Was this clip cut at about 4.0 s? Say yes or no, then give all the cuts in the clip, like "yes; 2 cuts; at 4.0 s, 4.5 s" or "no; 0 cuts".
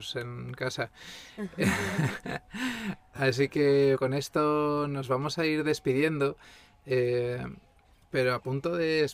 yes; 1 cut; at 4.0 s